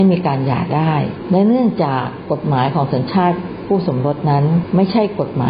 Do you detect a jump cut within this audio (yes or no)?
no